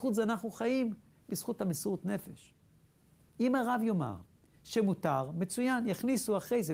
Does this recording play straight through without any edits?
no; 1 cut; at 3.3 s

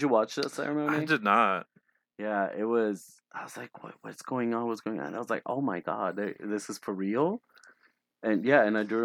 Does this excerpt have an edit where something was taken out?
no; 0 cuts

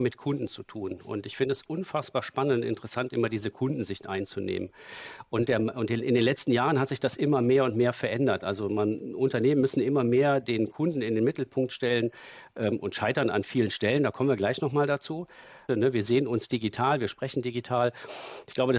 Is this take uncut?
no; 1 cut; at 15.7 s

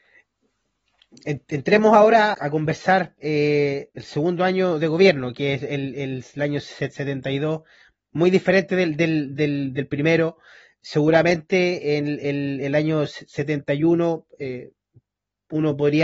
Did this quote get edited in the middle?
yes; 1 cut; at 2.3 s

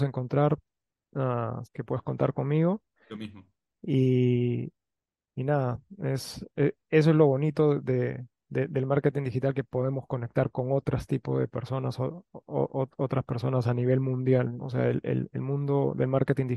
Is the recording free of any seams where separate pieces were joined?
no; 2 cuts; at 1.6 s, 14.6 s

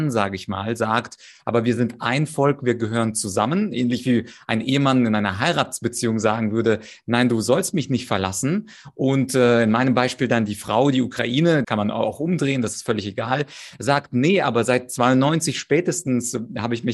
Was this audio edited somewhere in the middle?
yes; 1 cut; at 11.6 s

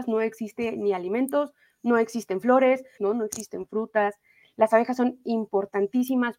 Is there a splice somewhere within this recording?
yes; 1 cut; at 3.0 s

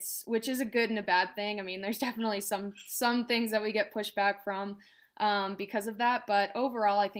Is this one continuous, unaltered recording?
yes; 0 cuts

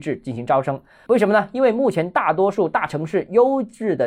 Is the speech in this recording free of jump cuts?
no; 1 cut; at 1.1 s

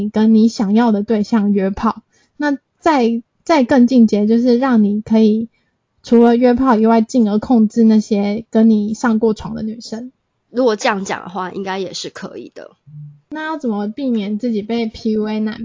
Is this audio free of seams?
yes; 0 cuts

